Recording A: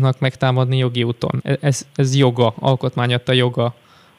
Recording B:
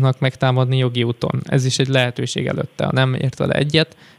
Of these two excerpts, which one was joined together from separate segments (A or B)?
A